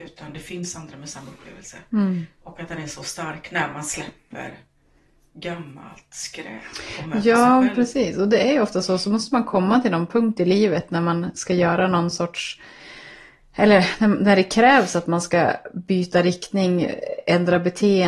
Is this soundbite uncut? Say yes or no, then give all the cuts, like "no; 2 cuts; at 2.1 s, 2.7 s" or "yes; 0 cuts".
yes; 0 cuts